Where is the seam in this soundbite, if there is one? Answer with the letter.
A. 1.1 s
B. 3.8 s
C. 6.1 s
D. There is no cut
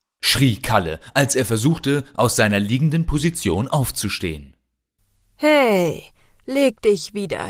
D